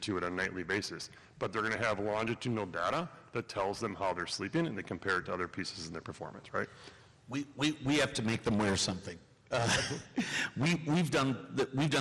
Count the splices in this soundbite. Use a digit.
0